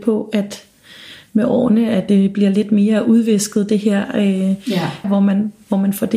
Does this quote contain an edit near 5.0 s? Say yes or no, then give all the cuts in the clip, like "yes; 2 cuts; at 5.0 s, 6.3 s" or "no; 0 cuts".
yes; 1 cut; at 5.0 s